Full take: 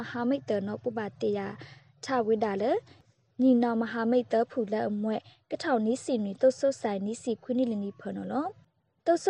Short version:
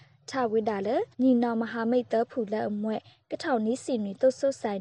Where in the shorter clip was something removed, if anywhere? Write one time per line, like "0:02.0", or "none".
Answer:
0:01.1